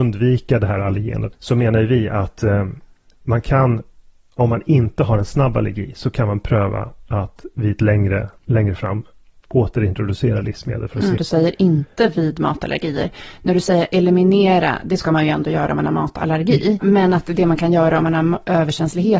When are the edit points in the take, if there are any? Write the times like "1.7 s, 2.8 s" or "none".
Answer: 1.3 s, 11.2 s, 16.8 s